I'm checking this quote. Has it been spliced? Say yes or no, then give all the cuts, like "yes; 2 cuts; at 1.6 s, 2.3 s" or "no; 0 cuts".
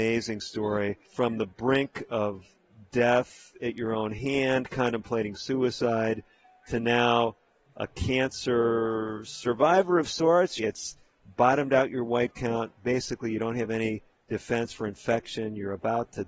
yes; 2 cuts; at 1.0 s, 10.6 s